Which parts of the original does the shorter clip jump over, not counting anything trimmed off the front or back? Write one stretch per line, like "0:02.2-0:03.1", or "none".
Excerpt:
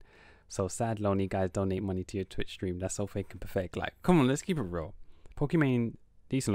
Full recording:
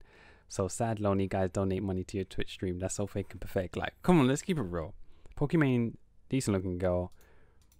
none